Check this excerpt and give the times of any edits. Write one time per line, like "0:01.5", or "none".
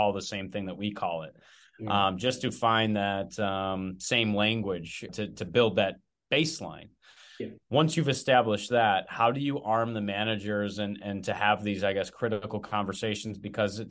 0:05.1